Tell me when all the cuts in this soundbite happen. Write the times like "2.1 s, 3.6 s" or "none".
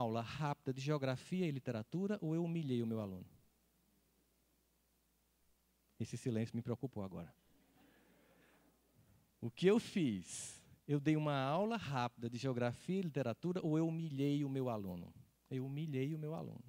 none